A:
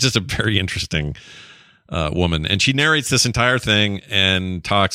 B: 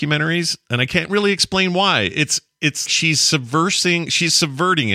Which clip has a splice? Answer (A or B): B